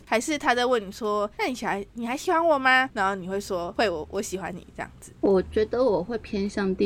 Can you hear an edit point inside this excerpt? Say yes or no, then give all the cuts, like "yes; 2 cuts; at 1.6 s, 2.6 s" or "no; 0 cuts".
no; 0 cuts